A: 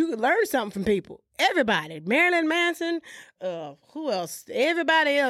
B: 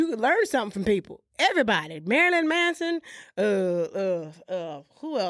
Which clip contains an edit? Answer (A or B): A